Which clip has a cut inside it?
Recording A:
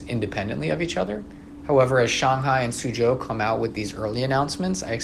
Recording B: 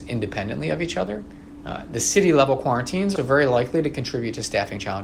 B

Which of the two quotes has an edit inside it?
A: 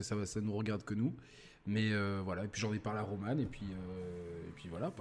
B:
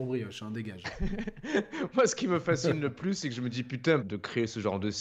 B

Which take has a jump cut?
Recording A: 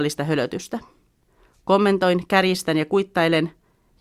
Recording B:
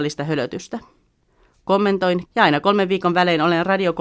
B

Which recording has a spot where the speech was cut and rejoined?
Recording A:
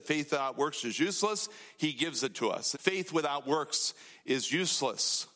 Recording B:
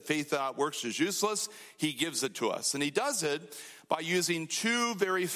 A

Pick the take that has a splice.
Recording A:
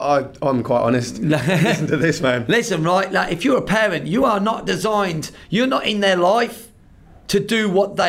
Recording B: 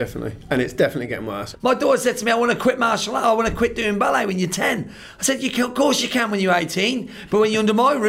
B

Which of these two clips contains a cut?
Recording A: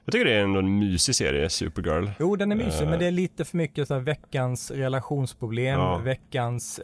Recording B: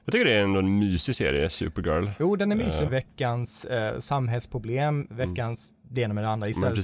B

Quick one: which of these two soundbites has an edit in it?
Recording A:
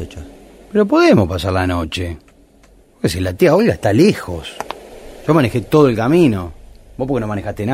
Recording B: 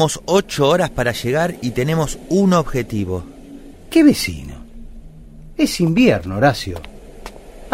B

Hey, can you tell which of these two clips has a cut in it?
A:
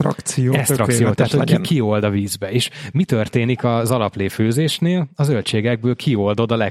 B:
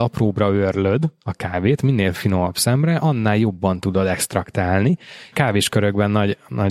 B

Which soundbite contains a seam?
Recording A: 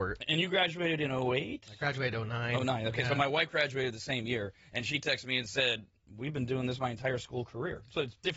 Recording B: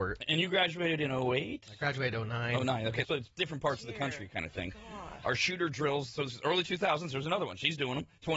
B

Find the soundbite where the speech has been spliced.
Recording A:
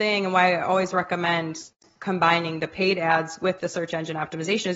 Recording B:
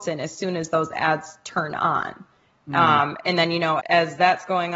B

